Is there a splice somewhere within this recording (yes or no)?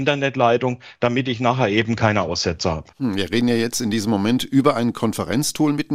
yes